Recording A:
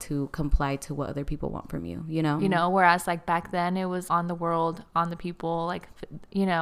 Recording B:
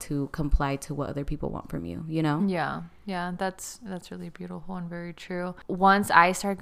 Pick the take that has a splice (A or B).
A